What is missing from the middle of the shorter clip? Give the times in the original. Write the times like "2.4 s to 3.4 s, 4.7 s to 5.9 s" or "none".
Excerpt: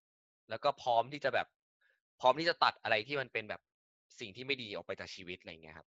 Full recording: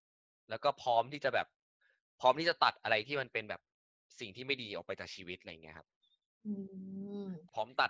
none

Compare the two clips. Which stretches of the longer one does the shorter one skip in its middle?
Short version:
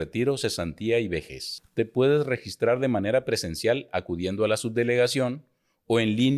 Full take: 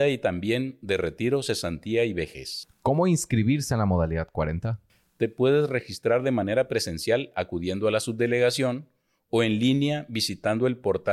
2.7 s to 5.1 s

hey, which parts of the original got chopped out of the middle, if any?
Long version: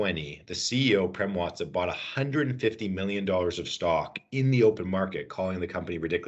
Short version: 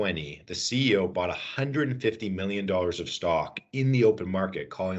1.1 s to 1.7 s

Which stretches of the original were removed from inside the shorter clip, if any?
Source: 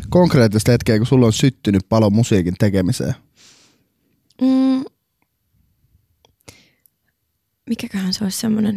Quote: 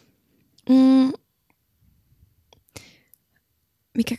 none

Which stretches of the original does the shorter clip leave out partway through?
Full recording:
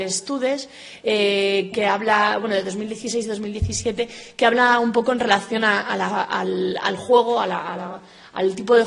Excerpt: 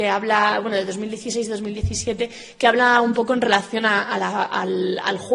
none

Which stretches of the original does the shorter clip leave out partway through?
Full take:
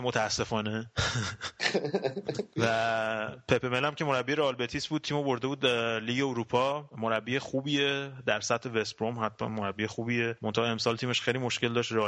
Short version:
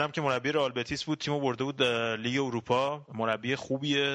none

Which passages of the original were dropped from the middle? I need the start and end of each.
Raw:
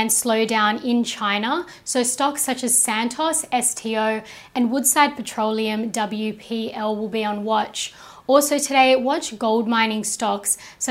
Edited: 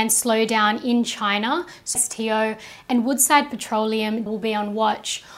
2.0 s to 3.6 s, 5.9 s to 7.0 s

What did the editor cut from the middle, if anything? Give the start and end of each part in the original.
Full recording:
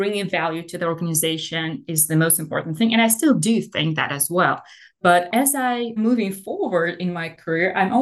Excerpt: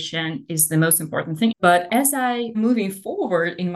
2.9 s to 4.9 s

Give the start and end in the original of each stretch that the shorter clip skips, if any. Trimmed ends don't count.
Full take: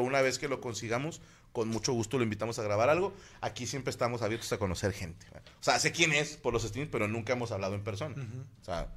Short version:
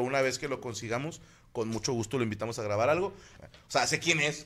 3.4 s to 5.3 s

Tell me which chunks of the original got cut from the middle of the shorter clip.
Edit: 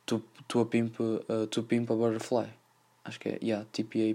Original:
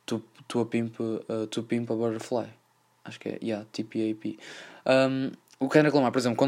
none

